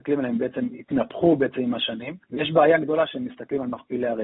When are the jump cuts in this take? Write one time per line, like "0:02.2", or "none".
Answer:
0:02.2